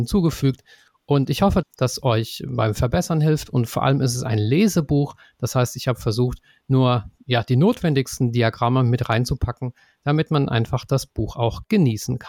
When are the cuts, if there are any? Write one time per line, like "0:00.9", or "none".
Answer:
0:01.6